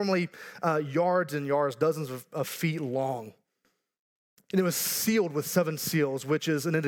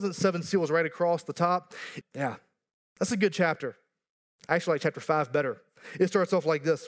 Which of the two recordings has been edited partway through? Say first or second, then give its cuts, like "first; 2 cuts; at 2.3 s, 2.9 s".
second; 1 cut; at 2.0 s